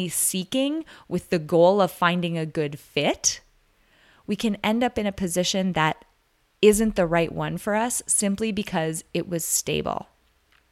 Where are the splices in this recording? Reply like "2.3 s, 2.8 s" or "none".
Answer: none